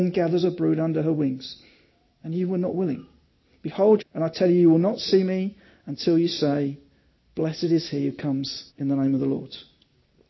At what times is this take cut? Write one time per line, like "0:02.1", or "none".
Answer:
0:04.0
0:08.7

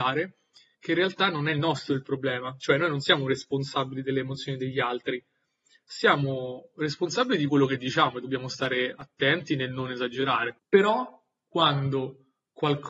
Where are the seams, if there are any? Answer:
none

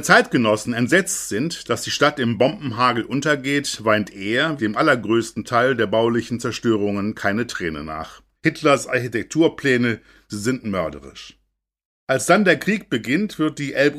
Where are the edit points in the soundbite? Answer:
0:04.6
0:08.3

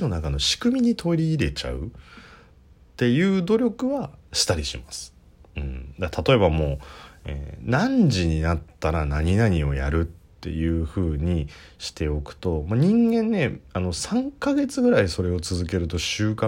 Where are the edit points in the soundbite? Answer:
none

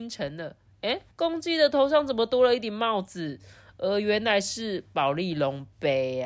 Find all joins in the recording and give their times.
0:01.1

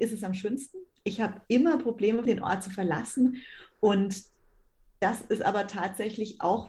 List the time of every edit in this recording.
0:02.3

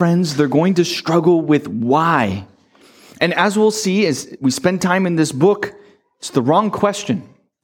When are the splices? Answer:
none

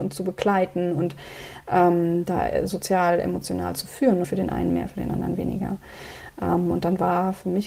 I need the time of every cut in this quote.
0:04.2

